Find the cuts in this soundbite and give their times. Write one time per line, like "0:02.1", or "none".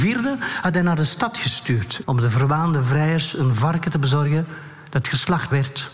0:02.0

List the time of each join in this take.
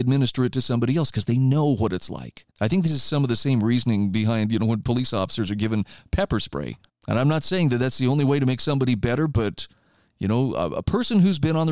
0:02.5
0:06.9

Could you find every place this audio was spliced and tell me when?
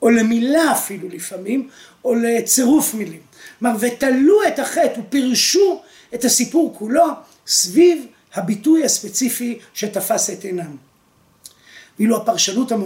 none

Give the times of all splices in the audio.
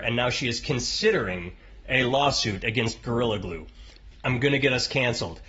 0:04.1

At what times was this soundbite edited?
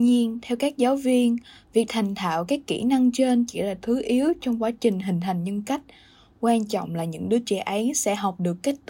none

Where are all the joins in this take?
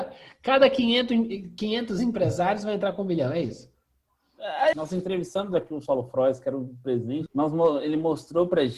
0:04.7
0:07.3

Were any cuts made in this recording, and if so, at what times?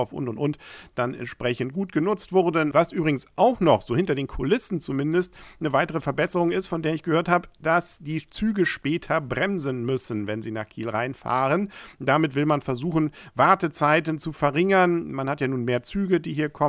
0:02.7

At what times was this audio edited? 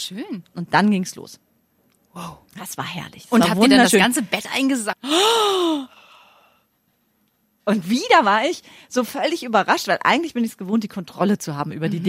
0:04.9

